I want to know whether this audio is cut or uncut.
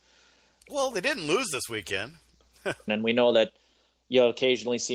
cut